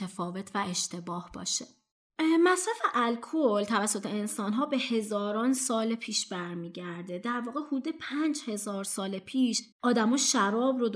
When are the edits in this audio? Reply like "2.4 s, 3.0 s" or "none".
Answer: 9.7 s